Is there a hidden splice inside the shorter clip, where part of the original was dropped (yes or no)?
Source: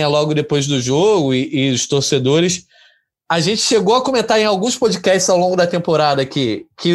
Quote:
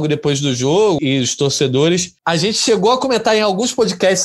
yes